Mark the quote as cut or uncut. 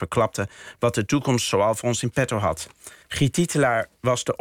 cut